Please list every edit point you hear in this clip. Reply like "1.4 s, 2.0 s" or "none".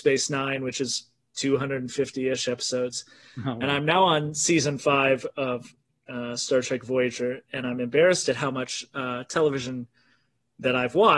none